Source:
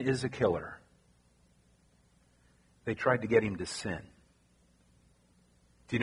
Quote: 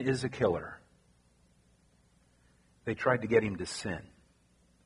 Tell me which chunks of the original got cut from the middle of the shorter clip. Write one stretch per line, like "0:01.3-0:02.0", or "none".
none